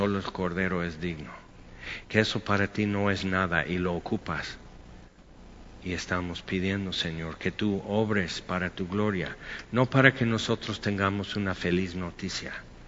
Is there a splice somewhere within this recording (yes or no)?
yes